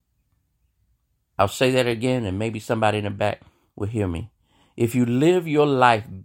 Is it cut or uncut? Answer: cut